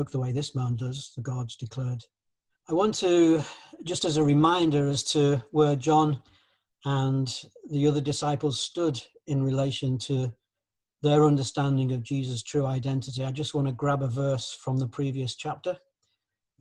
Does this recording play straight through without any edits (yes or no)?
no